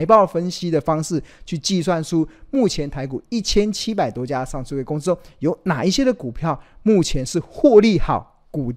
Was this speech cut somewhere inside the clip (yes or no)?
no